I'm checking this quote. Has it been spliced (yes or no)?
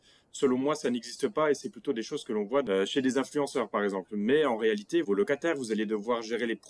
yes